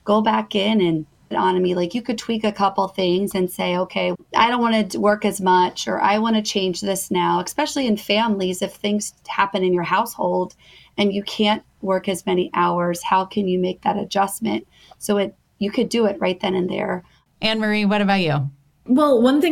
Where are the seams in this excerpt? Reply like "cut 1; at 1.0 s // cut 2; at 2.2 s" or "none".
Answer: cut 1; at 1.3 s // cut 2; at 4.1 s